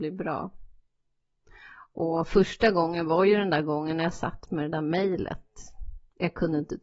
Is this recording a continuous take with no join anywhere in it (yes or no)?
yes